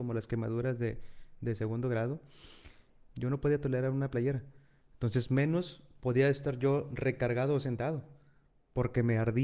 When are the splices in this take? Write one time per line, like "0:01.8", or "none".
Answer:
0:03.1